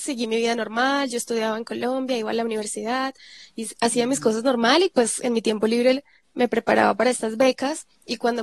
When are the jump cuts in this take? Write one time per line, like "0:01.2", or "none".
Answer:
none